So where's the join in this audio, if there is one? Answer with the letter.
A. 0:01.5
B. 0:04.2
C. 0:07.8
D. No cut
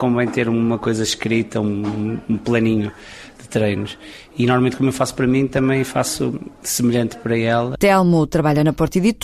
C